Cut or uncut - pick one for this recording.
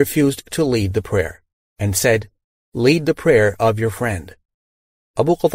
uncut